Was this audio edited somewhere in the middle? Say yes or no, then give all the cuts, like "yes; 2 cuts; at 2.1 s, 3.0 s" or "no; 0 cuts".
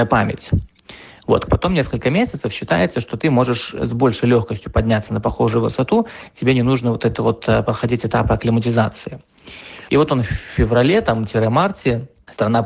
yes; 2 cuts; at 1.5 s, 9.9 s